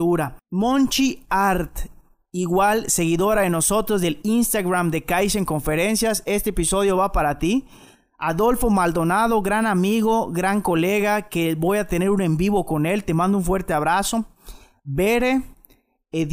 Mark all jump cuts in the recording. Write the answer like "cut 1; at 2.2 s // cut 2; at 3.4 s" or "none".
none